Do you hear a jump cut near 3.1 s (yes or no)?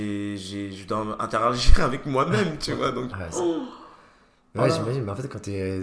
yes